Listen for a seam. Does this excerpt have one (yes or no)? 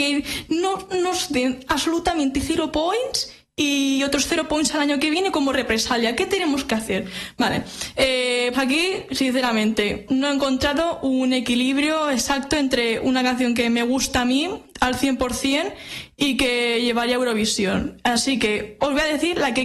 yes